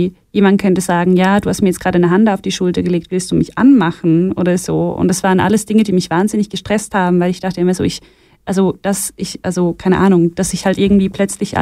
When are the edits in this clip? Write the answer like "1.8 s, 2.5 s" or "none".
none